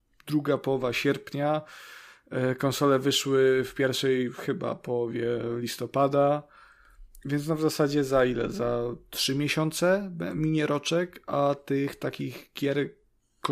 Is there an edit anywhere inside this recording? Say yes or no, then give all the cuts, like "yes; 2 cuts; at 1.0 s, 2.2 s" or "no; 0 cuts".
no; 0 cuts